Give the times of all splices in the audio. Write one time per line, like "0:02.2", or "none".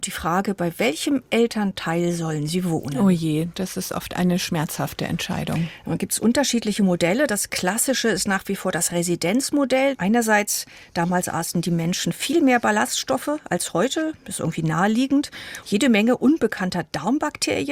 0:09.9
0:15.6